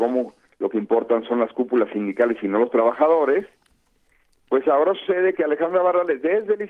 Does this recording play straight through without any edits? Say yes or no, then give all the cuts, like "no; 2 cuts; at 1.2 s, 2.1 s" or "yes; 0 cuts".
yes; 0 cuts